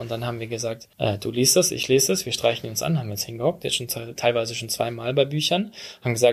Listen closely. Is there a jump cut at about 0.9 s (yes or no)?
yes